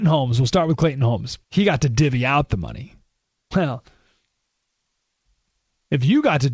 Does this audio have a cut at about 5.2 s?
no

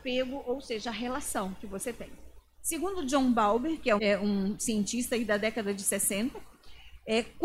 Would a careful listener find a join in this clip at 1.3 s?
no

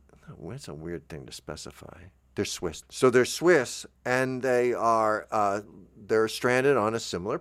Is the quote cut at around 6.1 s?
no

